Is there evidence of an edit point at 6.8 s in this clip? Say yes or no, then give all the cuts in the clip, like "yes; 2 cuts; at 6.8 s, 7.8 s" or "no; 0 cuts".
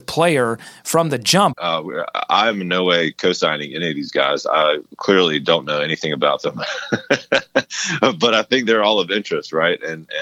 no; 1 cut; at 1.5 s